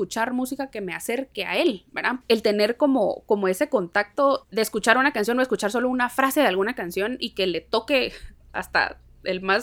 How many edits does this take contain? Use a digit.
2